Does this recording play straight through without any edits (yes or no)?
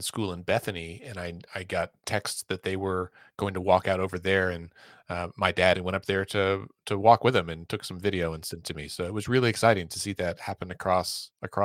no